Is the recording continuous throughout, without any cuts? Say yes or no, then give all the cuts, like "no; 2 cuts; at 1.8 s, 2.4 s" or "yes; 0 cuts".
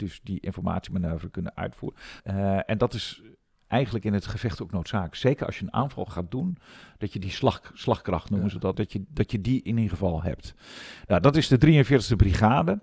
no; 2 cuts; at 2.2 s, 8.7 s